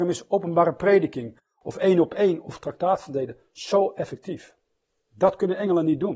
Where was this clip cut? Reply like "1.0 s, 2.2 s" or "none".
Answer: none